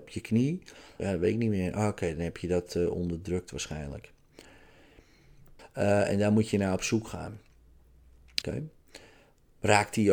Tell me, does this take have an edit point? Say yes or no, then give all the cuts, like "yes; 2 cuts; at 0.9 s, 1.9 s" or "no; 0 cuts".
yes; 3 cuts; at 1.0 s, 5.6 s, 8.4 s